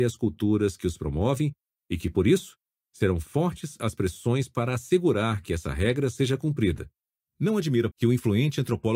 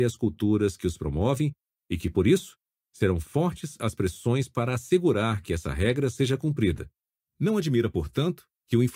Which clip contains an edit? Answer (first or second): first